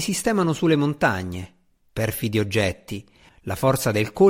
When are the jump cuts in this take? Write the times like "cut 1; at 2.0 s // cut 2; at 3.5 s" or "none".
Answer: cut 1; at 3.3 s